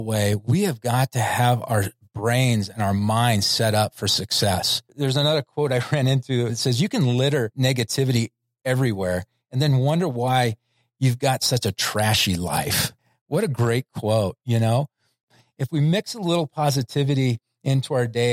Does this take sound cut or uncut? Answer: cut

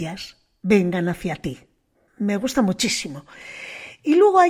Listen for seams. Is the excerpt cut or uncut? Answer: cut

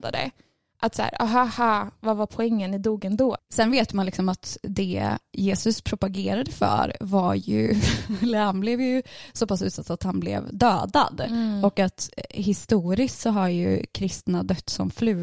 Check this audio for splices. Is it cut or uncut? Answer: cut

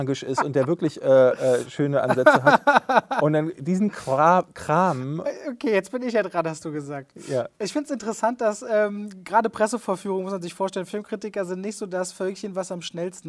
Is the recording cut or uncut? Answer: uncut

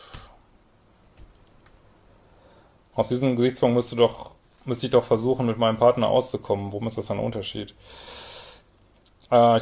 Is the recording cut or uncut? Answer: uncut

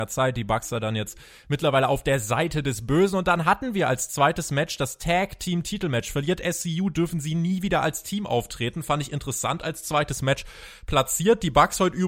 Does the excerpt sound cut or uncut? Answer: uncut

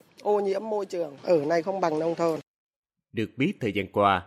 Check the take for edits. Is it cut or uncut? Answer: uncut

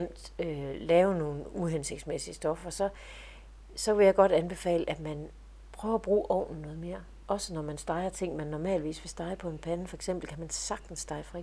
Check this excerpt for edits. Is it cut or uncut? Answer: uncut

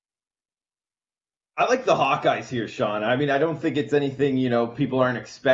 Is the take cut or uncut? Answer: uncut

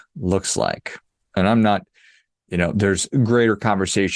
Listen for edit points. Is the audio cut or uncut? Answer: uncut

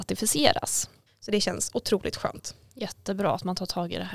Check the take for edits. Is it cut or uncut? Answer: cut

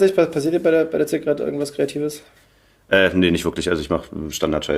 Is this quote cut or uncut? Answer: uncut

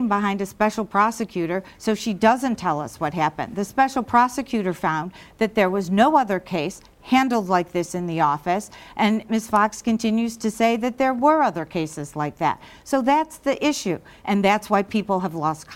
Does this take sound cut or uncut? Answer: cut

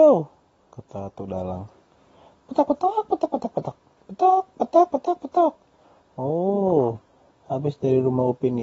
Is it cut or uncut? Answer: uncut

